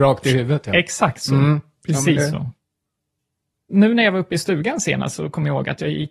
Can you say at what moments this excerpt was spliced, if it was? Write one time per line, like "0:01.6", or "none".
none

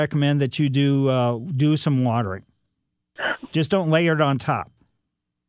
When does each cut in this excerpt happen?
0:03.5

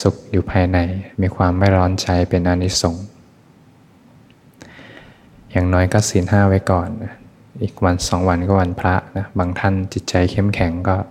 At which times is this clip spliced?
0:01.1

